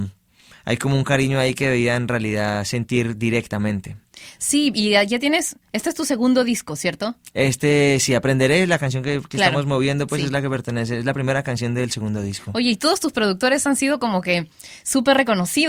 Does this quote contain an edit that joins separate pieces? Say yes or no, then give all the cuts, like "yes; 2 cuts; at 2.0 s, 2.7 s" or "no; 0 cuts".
no; 0 cuts